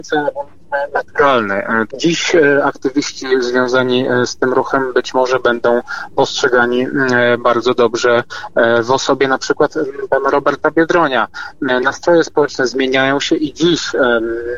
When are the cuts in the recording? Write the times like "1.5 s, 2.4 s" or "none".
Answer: 1.9 s